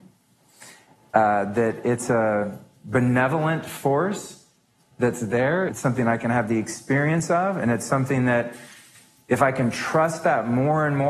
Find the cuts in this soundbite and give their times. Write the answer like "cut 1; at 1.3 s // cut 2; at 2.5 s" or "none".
cut 1; at 5.7 s

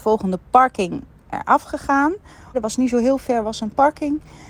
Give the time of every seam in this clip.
cut 1; at 2.5 s

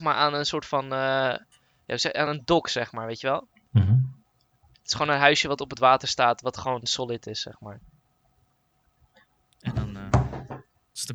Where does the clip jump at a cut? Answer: none

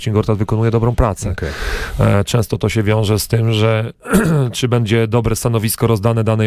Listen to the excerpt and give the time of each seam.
none

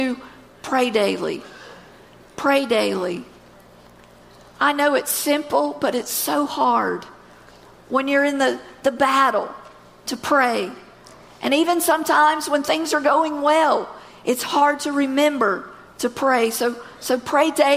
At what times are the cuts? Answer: none

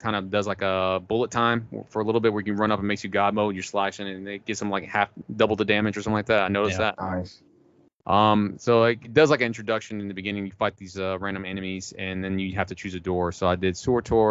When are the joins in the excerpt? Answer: none

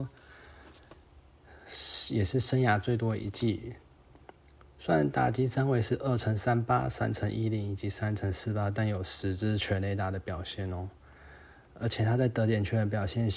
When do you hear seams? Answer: none

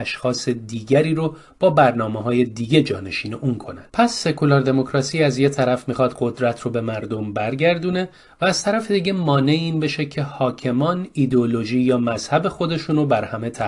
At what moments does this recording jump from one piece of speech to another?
cut 1; at 3.9 s

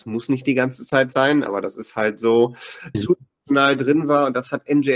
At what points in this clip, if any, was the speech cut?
cut 1; at 2.9 s

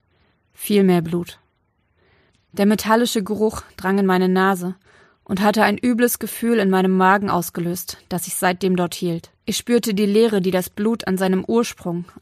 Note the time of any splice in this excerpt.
cut 1; at 9.4 s

